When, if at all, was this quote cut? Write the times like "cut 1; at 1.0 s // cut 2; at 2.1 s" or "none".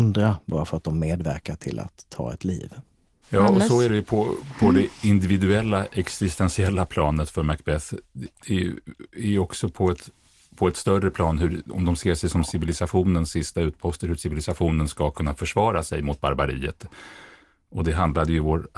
cut 1; at 3.2 s